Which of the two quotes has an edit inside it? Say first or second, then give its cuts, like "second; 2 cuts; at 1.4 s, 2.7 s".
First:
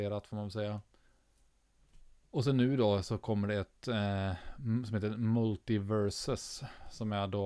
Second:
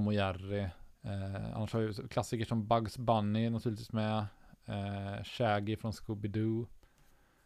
second; 1 cut; at 0.9 s